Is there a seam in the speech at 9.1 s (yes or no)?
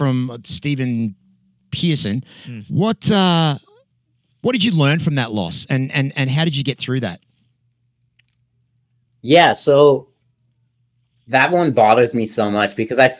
no